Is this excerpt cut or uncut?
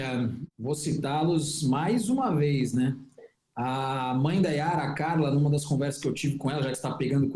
uncut